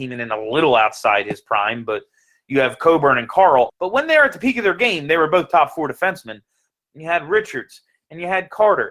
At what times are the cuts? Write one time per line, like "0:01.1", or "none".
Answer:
0:03.7
0:06.7